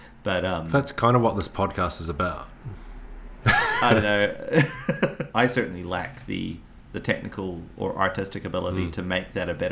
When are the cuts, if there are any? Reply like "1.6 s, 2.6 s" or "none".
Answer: 3.4 s, 5.3 s